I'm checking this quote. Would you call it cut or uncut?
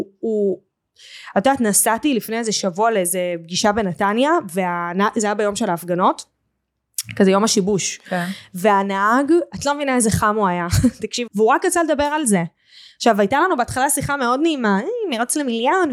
cut